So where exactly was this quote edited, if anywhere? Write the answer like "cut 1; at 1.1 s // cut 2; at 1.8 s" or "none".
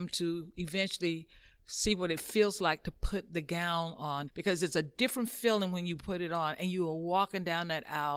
cut 1; at 4.3 s

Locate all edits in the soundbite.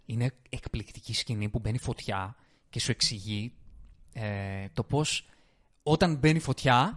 none

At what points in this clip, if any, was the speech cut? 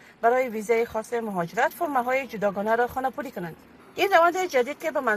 cut 1; at 3.8 s

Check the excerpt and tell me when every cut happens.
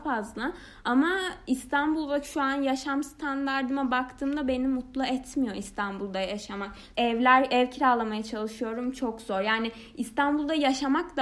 cut 1; at 6.9 s

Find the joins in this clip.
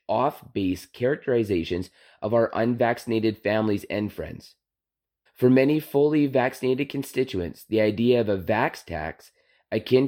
cut 1; at 5.3 s

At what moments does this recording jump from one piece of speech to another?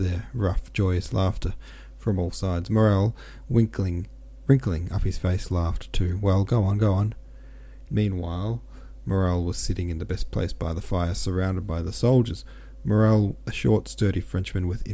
cut 1; at 7.9 s

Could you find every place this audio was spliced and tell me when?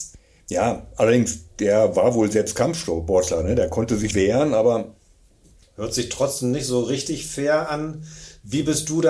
cut 1; at 4.1 s

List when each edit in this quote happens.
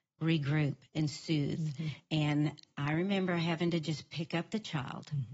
none

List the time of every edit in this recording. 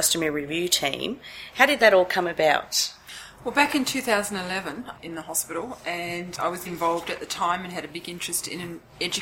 cut 1; at 4.9 s // cut 2; at 6.7 s

